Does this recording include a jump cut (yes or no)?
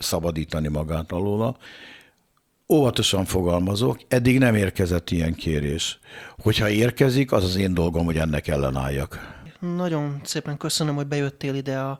no